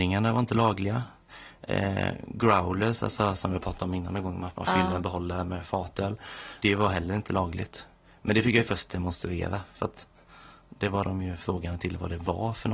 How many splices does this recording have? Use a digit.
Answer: 0